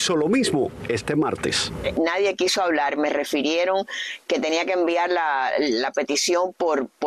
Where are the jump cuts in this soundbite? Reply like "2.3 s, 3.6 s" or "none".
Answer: none

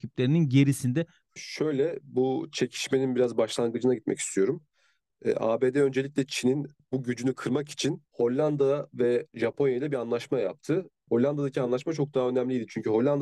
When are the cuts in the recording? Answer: 1.3 s, 11.1 s

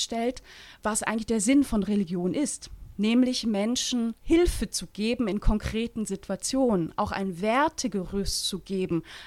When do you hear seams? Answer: 4.2 s

